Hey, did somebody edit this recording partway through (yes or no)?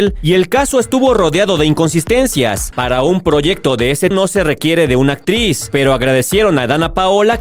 yes